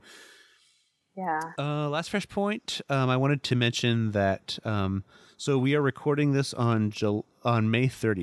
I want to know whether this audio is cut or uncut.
cut